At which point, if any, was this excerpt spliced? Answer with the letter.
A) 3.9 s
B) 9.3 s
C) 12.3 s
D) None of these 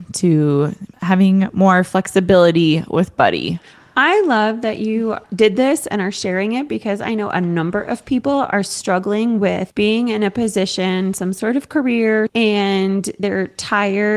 C